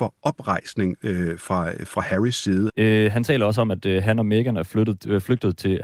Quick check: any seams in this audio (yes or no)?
yes